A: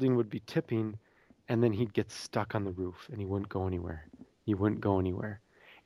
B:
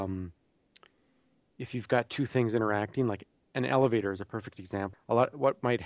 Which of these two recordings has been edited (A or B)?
B